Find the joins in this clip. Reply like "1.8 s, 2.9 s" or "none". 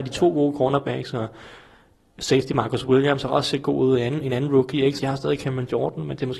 5.0 s